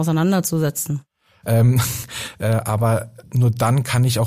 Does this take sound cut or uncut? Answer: cut